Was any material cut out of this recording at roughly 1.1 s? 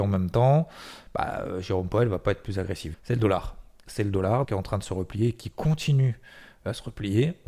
no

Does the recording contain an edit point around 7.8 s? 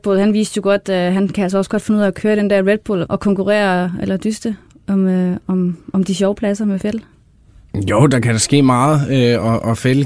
no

